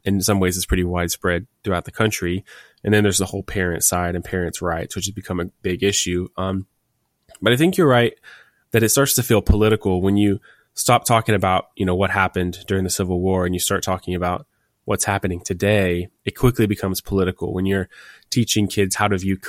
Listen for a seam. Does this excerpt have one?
no; 0 cuts

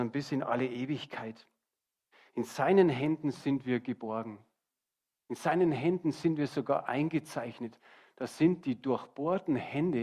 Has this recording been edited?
no; 0 cuts

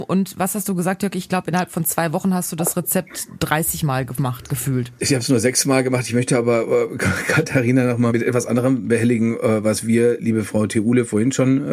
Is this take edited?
yes; 1 cut; at 8.1 s

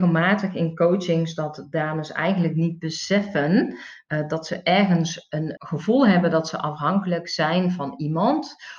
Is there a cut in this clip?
yes; 1 cut; at 5.6 s

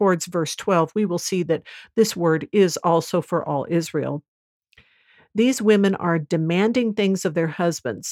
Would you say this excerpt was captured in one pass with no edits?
yes; 0 cuts

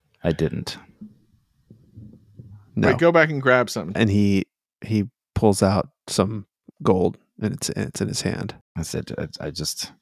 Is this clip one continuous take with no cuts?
no; 2 cuts; at 3.9 s, 8.6 s

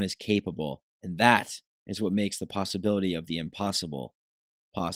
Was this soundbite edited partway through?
no; 0 cuts

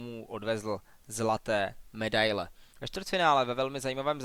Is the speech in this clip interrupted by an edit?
yes; 1 cut; at 2.7 s

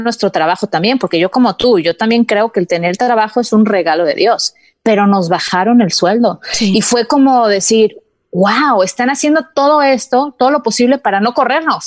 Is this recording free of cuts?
yes; 0 cuts

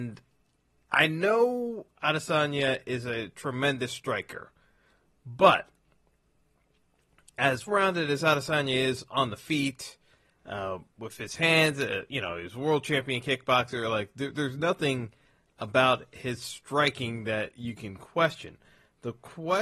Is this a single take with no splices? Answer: no; 1 cut; at 7.7 s

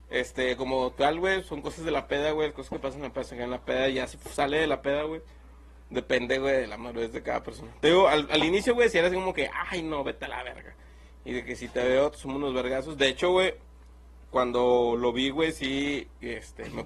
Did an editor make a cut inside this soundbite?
no; 0 cuts

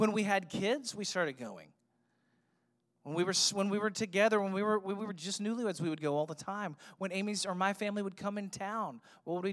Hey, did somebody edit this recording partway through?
no; 0 cuts

